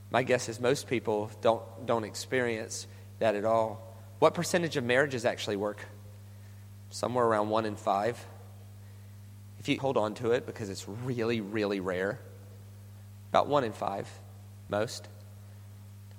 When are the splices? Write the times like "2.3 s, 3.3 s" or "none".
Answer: 9.8 s, 14.7 s